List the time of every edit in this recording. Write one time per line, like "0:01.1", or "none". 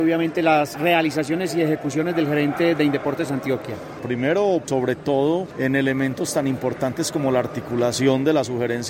0:04.6